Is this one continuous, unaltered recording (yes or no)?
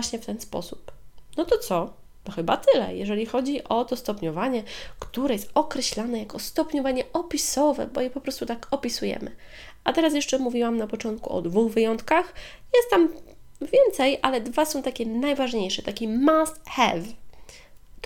yes